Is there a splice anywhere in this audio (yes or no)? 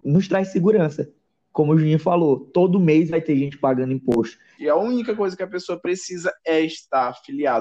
yes